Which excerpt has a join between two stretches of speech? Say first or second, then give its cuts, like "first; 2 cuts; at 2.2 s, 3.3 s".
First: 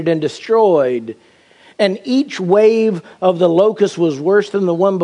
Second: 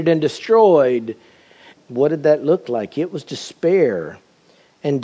second; 1 cut; at 1.7 s